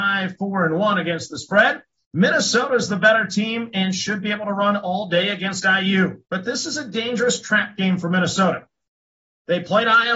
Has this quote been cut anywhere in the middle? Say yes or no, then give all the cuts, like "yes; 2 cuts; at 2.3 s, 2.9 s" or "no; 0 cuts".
yes; 2 cuts; at 2.0 s, 6.3 s